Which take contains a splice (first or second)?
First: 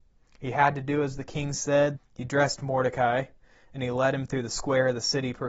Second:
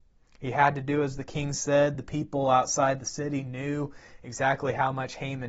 first